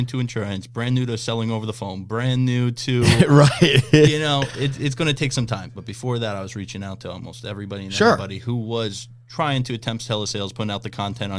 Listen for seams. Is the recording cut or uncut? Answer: cut